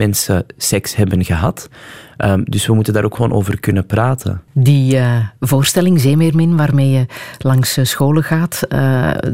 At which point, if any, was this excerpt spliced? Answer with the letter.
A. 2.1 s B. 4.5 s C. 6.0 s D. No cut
B